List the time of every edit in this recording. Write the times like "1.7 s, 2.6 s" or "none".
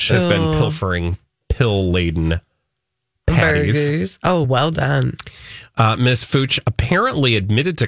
none

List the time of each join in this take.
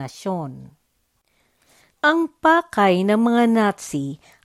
1.9 s

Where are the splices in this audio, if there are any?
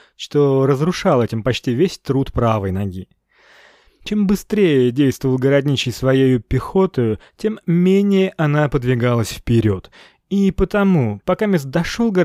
none

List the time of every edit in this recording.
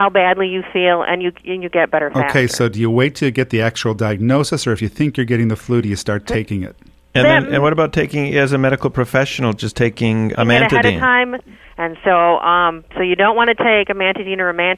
10.3 s, 11.6 s

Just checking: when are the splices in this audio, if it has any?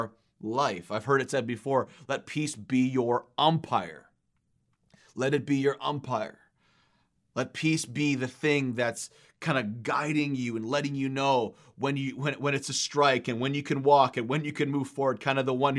none

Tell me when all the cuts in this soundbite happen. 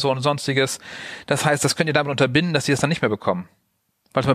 none

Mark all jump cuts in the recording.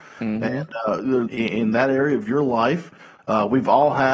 1.3 s

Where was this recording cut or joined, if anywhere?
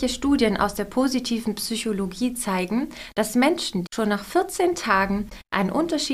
3.9 s

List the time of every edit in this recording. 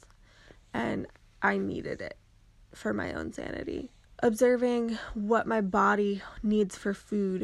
4.0 s

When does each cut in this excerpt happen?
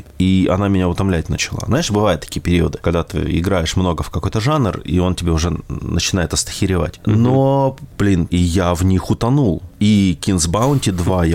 8.3 s

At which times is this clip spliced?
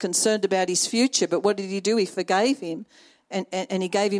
none

